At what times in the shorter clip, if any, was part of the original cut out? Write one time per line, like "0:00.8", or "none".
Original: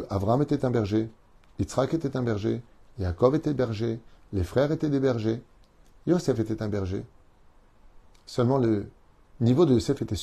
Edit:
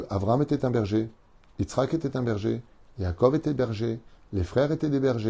none